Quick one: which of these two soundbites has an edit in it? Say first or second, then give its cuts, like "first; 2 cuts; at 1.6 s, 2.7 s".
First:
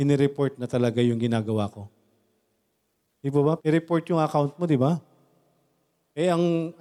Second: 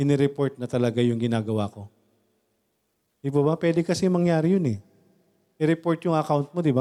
first; 1 cut; at 3.6 s